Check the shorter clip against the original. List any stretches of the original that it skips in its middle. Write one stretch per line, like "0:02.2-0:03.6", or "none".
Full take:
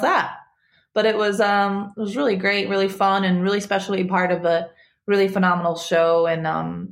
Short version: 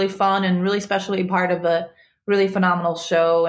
none